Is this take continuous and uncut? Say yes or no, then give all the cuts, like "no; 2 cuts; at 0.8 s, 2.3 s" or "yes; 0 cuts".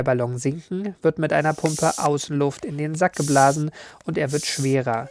yes; 0 cuts